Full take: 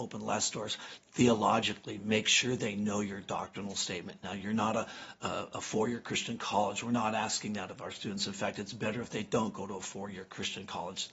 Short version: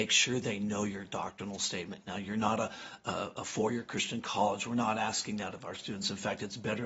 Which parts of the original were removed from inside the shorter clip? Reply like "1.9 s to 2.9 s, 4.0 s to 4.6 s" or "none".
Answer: none